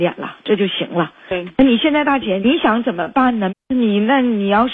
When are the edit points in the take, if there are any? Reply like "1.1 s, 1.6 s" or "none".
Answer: 2.4 s, 3.5 s